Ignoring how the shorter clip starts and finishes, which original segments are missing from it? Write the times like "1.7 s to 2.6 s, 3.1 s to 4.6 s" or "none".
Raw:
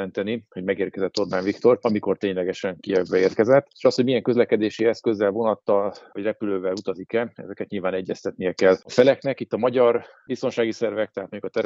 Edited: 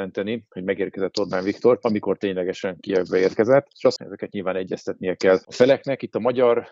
4.0 s to 7.3 s